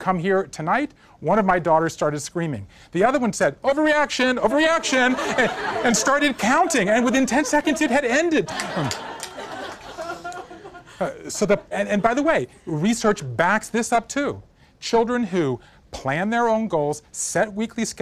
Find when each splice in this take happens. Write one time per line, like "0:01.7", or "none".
0:08.5
0:11.7